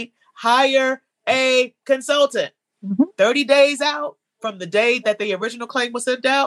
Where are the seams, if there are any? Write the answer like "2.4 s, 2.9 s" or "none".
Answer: 2.8 s